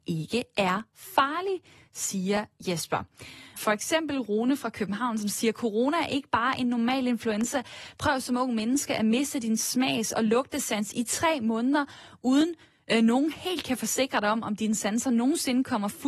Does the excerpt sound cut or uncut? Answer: cut